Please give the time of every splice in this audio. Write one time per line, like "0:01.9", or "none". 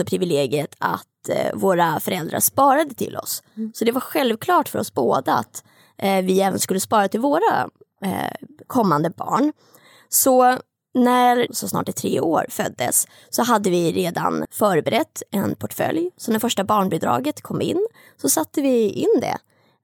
0:11.5
0:14.4